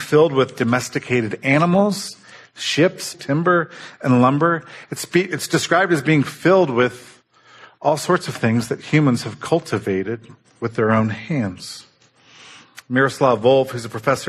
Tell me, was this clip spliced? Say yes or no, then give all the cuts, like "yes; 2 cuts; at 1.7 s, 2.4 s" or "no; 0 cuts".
yes; 1 cut; at 3.1 s